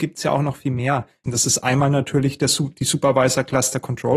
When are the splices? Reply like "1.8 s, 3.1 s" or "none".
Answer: 1.2 s